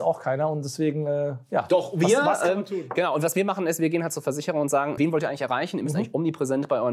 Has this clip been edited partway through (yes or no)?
yes